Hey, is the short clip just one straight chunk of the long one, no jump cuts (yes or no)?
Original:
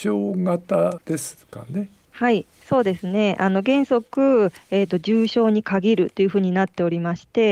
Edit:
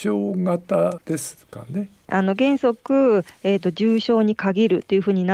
no